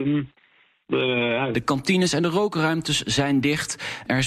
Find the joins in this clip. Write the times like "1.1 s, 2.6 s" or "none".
1.5 s